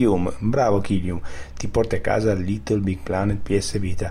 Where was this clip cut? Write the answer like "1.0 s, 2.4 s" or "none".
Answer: none